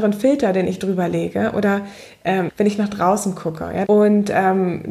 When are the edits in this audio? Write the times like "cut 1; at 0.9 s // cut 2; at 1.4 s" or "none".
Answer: cut 1; at 2.5 s // cut 2; at 3.8 s